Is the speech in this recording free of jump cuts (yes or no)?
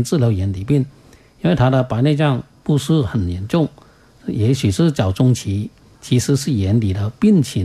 no